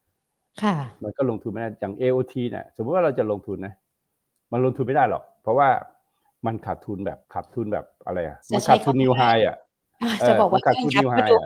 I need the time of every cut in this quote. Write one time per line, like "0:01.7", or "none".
0:07.2
0:08.4